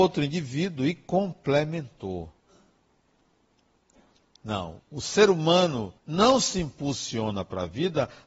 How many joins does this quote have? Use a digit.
2